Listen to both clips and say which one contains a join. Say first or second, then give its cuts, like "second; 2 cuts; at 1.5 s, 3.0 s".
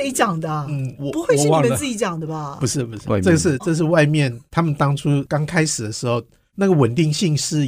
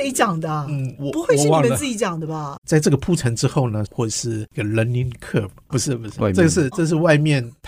second; 3 cuts; at 2.6 s, 3.9 s, 5.7 s